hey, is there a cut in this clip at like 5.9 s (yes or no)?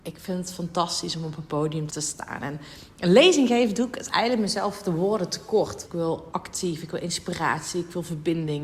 yes